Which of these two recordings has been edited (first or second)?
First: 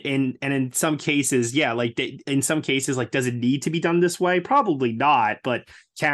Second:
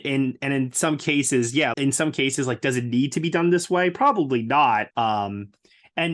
second